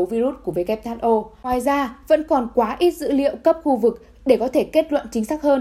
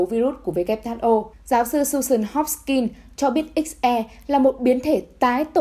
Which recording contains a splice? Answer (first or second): second